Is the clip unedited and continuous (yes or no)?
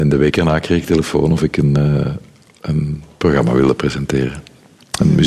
yes